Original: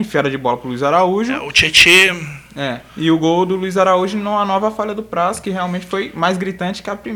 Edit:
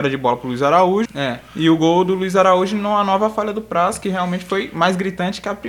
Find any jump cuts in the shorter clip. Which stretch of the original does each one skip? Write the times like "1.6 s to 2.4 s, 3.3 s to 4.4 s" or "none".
1.3 s to 2.5 s